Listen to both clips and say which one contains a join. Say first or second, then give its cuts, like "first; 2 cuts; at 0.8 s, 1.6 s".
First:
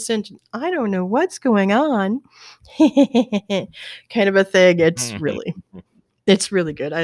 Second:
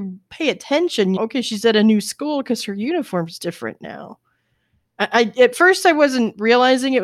second; 1 cut; at 1.2 s